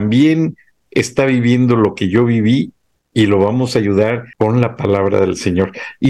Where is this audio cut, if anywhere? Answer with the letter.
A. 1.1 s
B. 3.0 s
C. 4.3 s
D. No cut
C